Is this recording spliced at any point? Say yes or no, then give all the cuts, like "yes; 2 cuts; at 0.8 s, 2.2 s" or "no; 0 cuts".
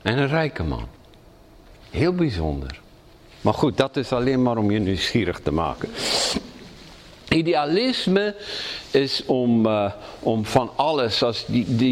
no; 0 cuts